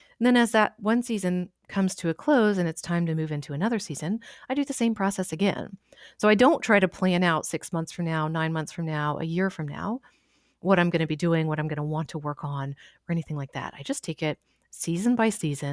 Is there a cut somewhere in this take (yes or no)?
no